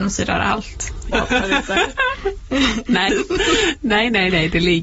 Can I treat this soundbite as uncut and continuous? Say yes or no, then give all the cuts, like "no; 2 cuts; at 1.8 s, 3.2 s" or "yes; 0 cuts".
no; 2 cuts; at 1.1 s, 3.1 s